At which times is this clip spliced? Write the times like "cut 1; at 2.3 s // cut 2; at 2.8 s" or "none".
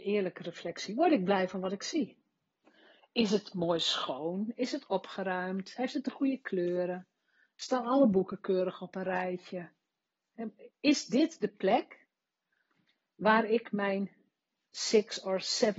none